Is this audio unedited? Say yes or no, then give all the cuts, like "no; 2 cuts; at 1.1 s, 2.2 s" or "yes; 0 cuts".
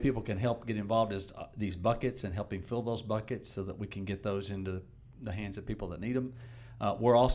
yes; 0 cuts